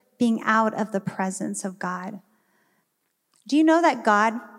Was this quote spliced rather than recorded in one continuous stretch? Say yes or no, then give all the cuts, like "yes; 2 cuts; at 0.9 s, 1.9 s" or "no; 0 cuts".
no; 0 cuts